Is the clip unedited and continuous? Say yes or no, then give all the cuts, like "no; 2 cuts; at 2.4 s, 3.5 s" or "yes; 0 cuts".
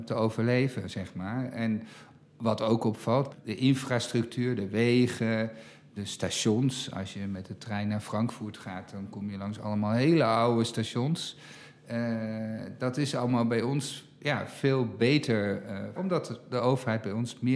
no; 1 cut; at 16.0 s